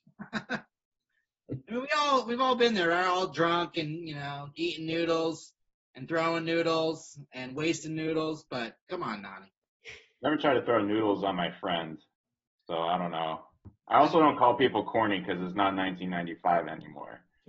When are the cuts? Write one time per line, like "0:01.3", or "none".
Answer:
none